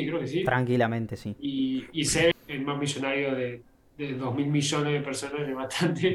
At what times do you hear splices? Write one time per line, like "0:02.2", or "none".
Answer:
0:02.3